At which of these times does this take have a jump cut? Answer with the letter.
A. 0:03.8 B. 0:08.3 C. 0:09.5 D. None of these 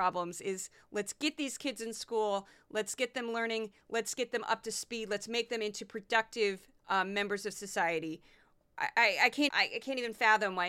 C